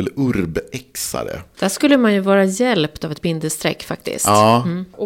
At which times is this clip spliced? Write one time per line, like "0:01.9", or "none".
0:01.5